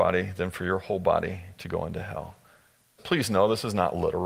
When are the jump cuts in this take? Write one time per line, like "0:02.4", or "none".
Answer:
0:03.0